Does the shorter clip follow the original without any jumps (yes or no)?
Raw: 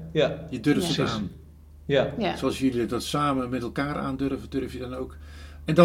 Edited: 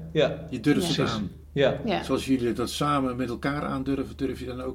no